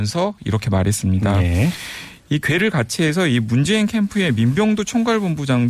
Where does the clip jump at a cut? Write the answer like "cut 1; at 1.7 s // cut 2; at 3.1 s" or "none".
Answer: none